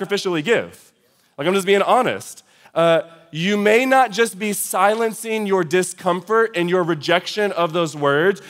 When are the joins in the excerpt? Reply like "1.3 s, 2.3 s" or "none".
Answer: 2.7 s